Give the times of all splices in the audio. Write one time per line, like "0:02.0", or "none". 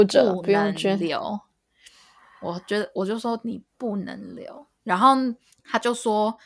0:04.8

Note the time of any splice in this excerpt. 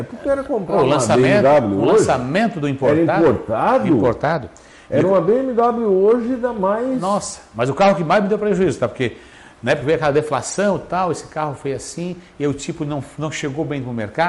none

